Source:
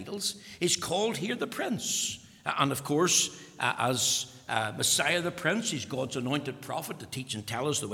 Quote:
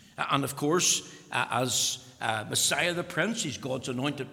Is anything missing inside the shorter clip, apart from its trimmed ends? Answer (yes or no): no